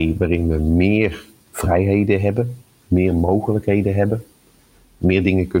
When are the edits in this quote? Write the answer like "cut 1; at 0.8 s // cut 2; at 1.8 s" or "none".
none